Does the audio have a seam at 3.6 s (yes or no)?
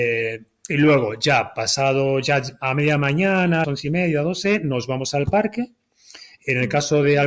yes